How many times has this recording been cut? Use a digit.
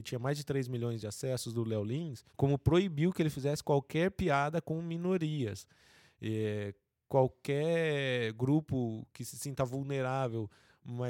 1